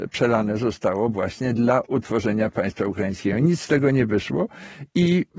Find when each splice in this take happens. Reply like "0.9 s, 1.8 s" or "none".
none